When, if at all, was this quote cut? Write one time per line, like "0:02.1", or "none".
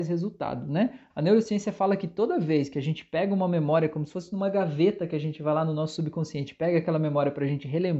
0:01.1

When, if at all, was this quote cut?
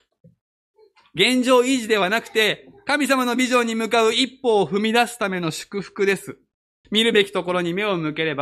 0:06.8

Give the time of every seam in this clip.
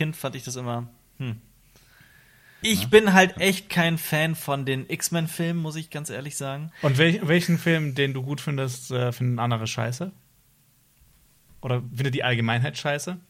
0:02.6
0:06.7

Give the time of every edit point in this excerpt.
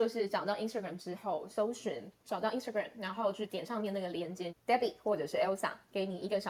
0:02.2
0:04.5

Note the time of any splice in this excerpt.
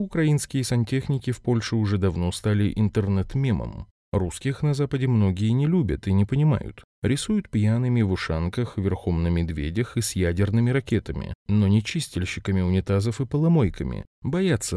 none

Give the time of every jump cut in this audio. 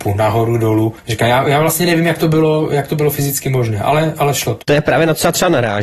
0:04.6

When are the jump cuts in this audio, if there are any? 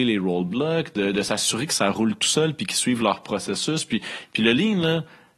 none

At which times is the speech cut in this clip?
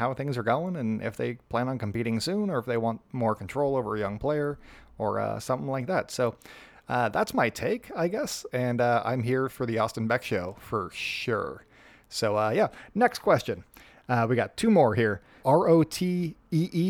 0:08.5
0:15.4

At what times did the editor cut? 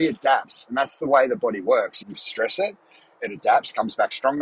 0:02.0

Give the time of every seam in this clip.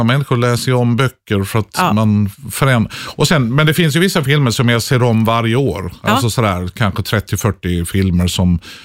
none

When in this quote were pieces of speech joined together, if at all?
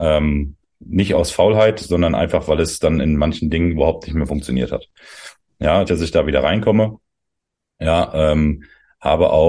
0:05.9

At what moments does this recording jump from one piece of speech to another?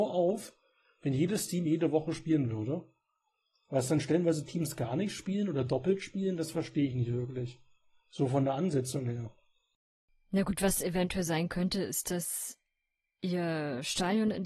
none

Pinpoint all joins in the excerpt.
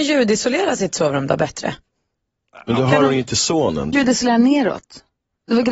0:03.9

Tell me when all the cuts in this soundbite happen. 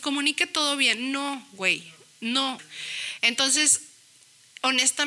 0:02.6

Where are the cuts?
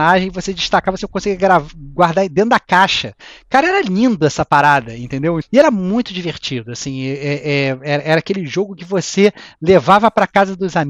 0:05.4

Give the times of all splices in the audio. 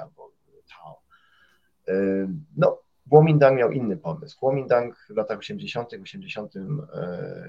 none

